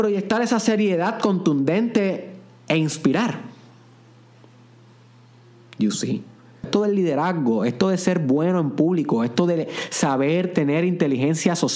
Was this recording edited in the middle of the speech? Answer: yes; 1 cut; at 6.6 s

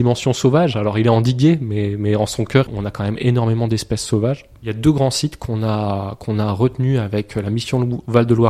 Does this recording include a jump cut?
yes; 1 cut; at 2.7 s

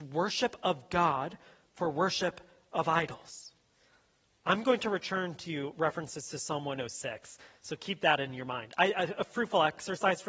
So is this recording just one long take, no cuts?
yes; 0 cuts

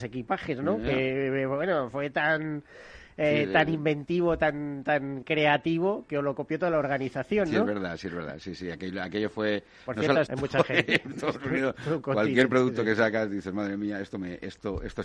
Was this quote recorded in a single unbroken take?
no; 1 cut; at 10.3 s

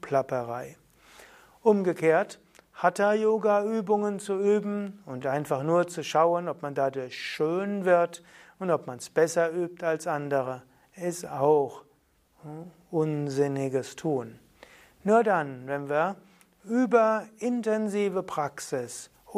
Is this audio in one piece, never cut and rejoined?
yes; 0 cuts

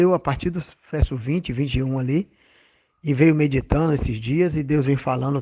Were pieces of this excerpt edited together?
no; 0 cuts

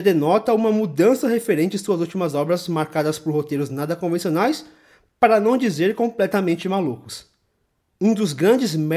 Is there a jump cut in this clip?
no; 0 cuts

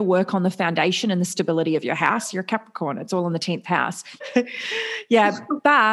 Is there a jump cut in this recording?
yes; 1 cut; at 4.2 s

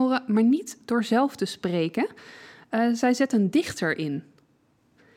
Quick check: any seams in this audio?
no; 0 cuts

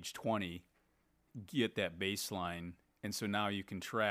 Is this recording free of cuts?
yes; 0 cuts

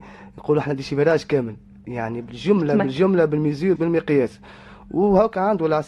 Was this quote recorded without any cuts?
no; 1 cut; at 3.8 s

